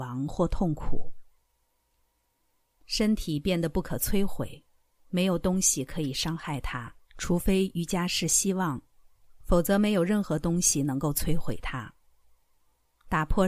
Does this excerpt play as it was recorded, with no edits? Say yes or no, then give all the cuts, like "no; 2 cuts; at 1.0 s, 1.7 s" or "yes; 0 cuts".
no; 2 cuts; at 2.8 s, 7.0 s